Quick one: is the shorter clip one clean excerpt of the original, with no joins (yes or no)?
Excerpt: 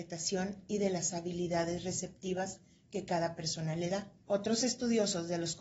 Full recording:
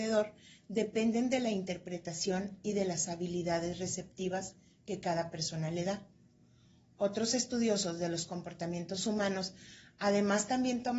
no